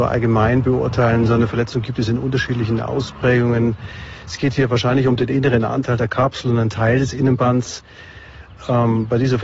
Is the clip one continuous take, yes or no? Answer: yes